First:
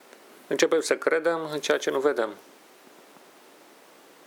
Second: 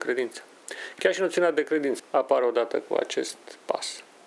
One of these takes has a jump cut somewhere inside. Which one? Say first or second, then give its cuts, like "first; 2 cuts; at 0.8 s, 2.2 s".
second; 1 cut; at 2.0 s